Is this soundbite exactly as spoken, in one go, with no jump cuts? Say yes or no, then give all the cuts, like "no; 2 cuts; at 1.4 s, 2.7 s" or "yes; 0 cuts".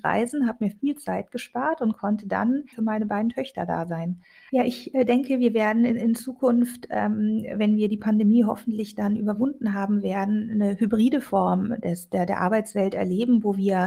no; 3 cuts; at 2.7 s, 4.5 s, 12.3 s